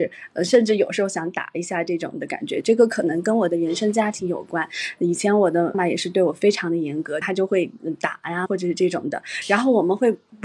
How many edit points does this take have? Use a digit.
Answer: 3